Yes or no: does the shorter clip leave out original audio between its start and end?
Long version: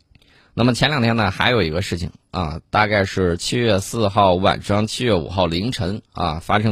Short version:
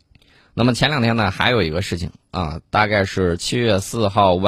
no